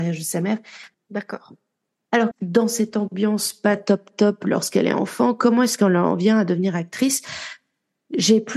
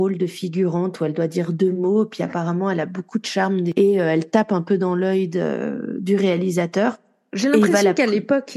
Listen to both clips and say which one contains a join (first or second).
first